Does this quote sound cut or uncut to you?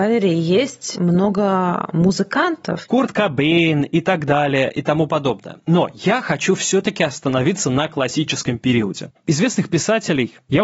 cut